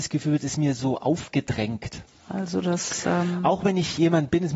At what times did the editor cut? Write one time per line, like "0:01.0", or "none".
0:02.1